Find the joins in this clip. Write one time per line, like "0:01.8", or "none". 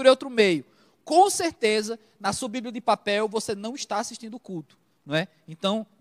none